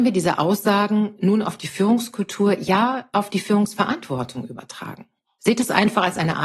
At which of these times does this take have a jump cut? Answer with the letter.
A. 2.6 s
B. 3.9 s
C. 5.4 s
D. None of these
C